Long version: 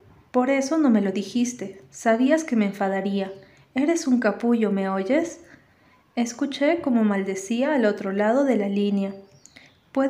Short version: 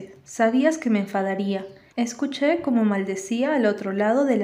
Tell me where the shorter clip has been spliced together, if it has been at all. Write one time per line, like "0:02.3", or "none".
0:01.9